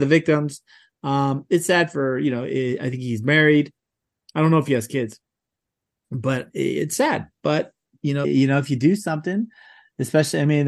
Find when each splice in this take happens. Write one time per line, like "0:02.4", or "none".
0:08.2